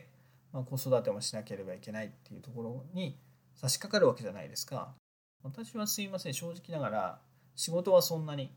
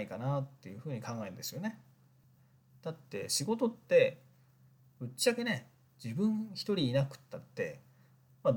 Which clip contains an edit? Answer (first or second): first